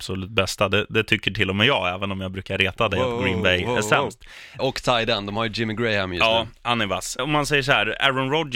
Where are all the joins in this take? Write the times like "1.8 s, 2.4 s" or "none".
4.6 s, 7.2 s